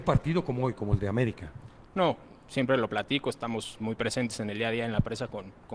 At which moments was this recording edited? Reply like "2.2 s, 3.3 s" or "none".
3.8 s